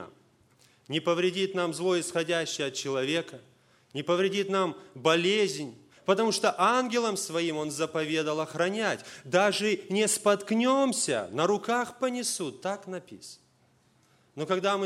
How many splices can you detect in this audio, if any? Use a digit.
1